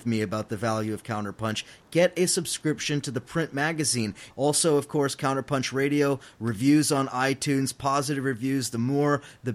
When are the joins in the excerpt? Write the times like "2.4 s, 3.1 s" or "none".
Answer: 4.3 s